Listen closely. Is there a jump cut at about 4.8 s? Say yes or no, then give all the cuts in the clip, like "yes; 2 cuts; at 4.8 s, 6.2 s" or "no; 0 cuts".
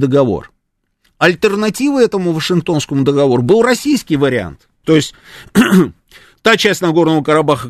yes; 1 cut; at 4.8 s